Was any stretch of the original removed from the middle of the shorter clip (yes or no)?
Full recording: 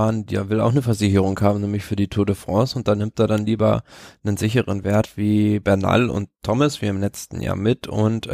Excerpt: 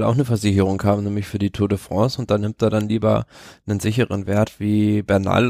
no